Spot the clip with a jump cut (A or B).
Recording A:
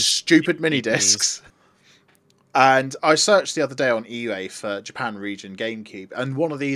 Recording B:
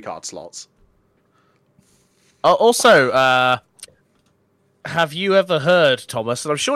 A